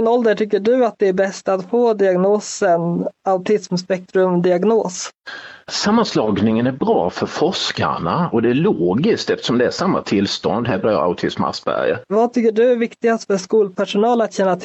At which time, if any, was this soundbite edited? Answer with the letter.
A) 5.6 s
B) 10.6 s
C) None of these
A